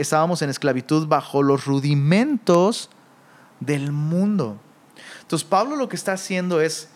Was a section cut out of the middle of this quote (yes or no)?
no